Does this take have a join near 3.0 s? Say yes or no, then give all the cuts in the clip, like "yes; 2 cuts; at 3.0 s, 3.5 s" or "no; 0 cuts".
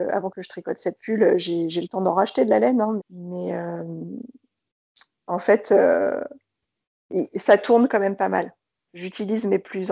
yes; 1 cut; at 3.0 s